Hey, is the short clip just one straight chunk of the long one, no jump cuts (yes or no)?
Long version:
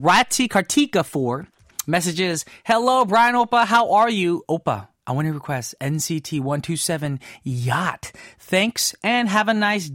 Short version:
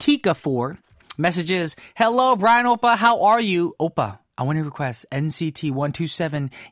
yes